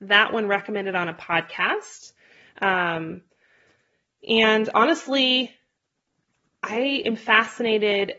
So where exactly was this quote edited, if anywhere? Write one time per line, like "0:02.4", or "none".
none